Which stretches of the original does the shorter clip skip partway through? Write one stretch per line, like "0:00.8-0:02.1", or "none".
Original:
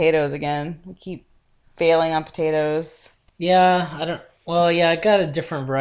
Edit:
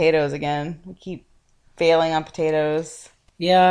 none